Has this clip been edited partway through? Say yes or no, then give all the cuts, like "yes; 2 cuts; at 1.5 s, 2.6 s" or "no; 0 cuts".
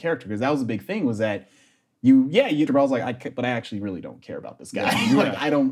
yes; 1 cut; at 2.7 s